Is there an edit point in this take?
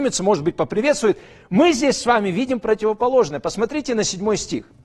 no; 0 cuts

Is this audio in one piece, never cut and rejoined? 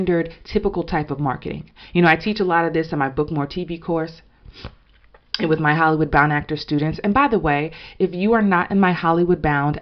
yes; 0 cuts

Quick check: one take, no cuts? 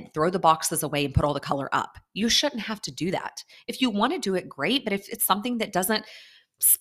yes; 0 cuts

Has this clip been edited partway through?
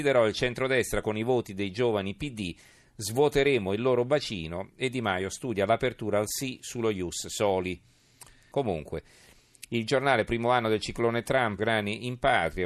yes; 2 cuts; at 8.5 s, 11.6 s

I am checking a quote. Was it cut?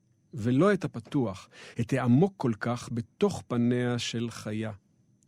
no; 0 cuts

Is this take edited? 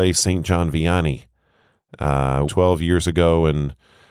yes; 1 cut; at 2.5 s

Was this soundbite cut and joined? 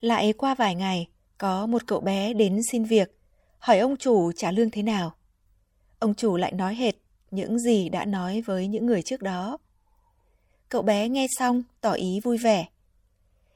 no; 0 cuts

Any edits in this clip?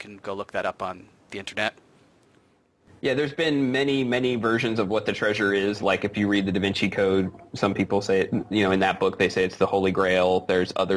no; 0 cuts

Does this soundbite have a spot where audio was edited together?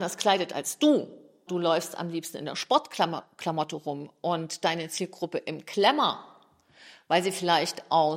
yes; 1 cut; at 1.5 s

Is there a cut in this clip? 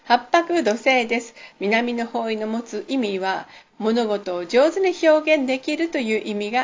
yes; 1 cut; at 1.5 s

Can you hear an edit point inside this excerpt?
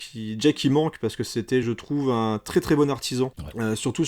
no; 0 cuts

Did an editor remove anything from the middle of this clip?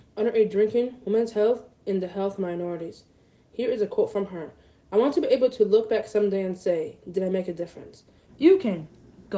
yes; 1 cut; at 8.3 s

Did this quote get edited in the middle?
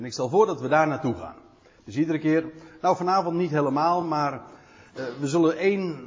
no; 0 cuts

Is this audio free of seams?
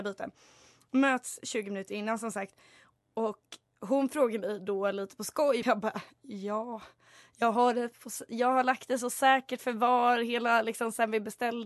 no; 1 cut; at 5.6 s

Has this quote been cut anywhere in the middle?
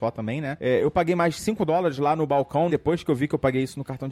yes; 1 cut; at 2.7 s

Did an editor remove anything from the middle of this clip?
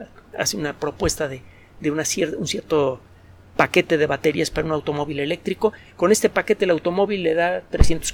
no; 0 cuts

